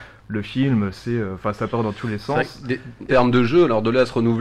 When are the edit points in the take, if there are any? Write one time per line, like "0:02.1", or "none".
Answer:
0:03.1